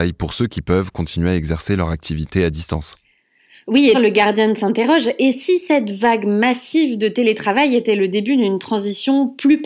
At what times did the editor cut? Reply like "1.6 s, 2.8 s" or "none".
3.9 s